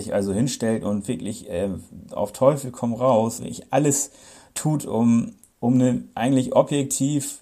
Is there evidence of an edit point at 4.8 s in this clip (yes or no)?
no